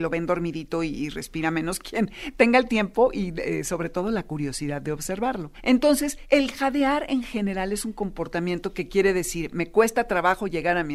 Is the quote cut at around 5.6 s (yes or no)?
no